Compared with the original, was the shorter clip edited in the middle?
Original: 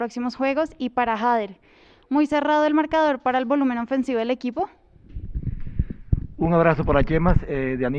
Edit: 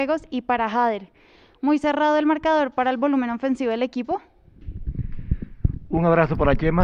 no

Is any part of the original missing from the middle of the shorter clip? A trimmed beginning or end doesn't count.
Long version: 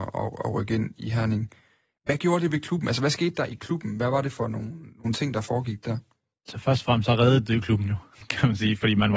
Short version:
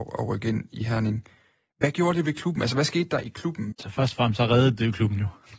yes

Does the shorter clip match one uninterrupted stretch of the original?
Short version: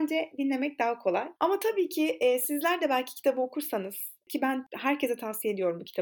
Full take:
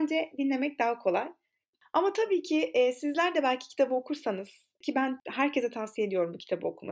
no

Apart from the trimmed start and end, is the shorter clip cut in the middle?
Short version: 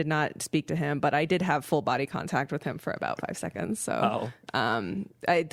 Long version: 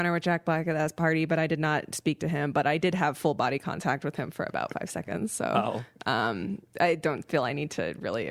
no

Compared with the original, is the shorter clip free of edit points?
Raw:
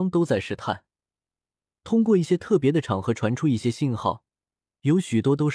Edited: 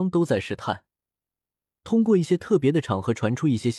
yes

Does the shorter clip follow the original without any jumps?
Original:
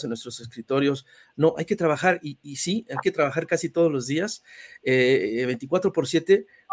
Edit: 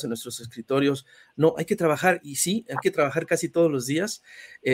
no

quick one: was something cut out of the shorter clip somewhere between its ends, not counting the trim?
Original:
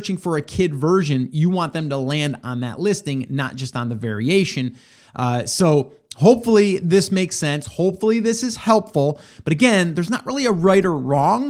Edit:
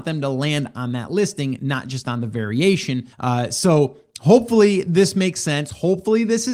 yes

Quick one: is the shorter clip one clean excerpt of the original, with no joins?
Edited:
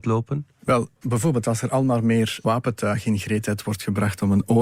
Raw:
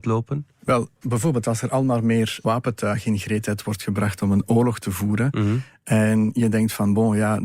yes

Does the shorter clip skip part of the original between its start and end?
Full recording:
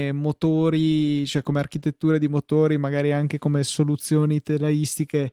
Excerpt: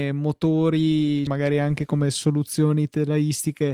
yes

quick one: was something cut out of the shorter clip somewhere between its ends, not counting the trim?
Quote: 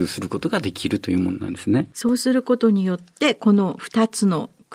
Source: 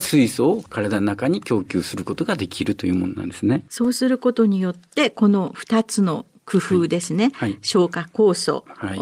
no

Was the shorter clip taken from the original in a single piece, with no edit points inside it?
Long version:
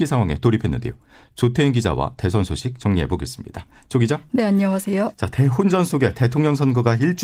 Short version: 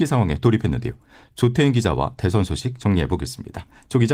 yes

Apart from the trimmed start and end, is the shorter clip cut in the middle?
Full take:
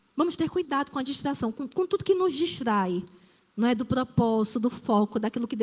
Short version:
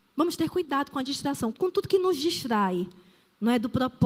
yes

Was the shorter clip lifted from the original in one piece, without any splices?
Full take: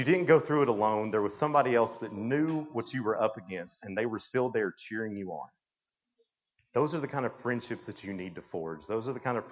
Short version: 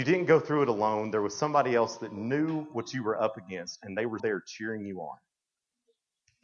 no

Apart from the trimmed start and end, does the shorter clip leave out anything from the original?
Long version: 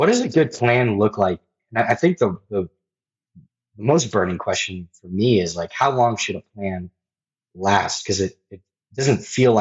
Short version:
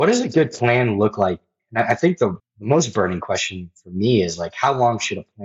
yes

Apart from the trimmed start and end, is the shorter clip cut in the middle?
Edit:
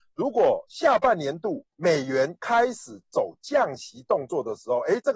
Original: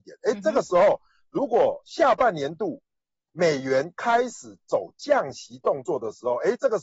yes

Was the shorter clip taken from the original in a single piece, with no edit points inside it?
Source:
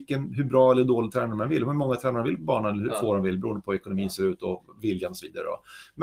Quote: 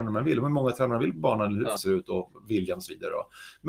no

